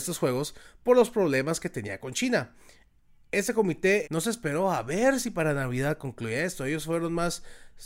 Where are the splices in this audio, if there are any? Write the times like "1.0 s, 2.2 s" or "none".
4.0 s

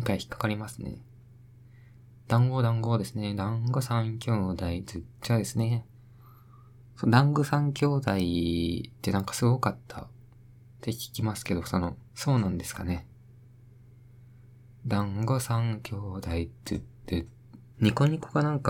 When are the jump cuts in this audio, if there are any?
12.1 s, 17.7 s

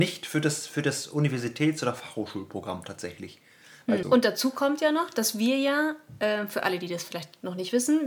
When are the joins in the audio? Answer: 4.0 s

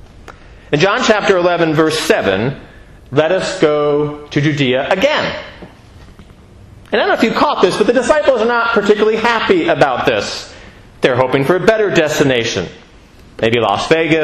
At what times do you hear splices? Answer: 3.0 s

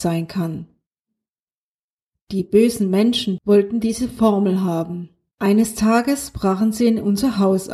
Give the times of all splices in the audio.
3.4 s, 5.3 s

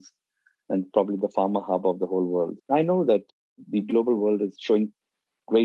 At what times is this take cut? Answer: 2.6 s

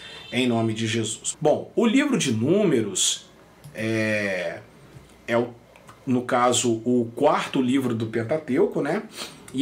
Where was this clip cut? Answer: 1.3 s

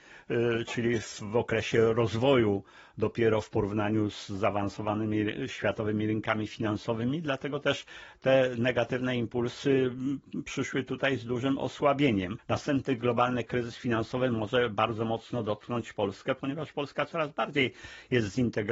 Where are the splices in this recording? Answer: 12.4 s

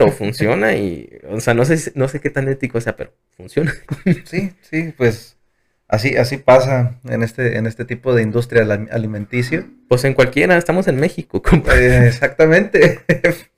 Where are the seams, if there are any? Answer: none

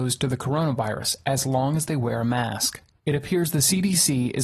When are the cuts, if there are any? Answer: 3.0 s

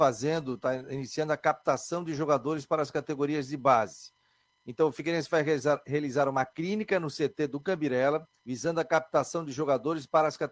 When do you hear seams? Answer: 8.4 s

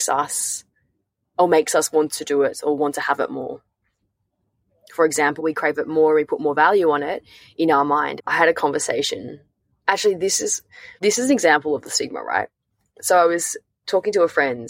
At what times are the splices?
5.4 s, 8.2 s, 11.0 s

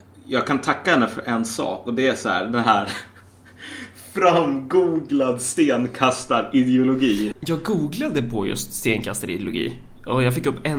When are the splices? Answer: 7.3 s

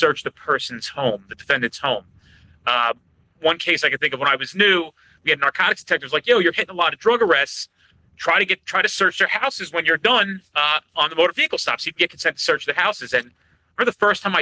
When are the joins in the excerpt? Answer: none

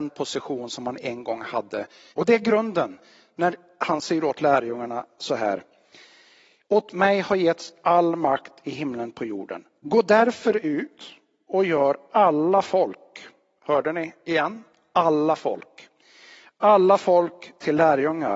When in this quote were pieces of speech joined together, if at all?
2.1 s

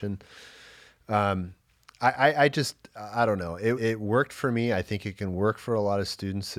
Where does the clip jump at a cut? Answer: 3.8 s

